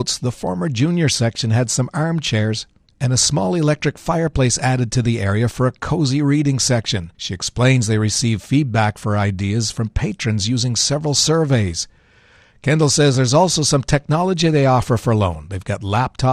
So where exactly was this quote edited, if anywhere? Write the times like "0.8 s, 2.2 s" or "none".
7.1 s